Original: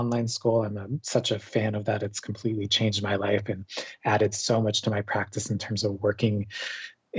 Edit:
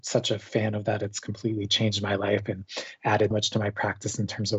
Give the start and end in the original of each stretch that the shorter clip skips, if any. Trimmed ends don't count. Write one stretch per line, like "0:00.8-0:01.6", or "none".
0:04.3-0:04.6